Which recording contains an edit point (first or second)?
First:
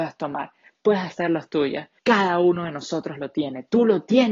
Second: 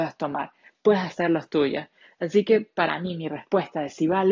first